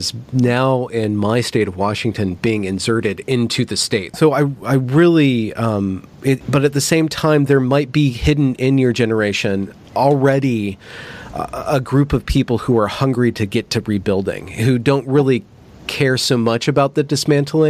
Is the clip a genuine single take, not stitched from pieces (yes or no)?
no